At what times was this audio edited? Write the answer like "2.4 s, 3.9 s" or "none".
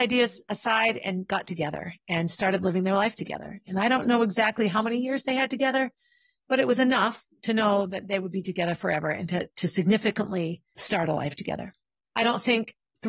none